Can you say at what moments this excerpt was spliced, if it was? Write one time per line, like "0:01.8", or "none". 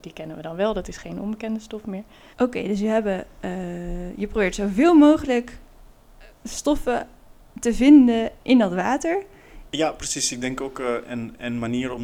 0:02.3
0:09.7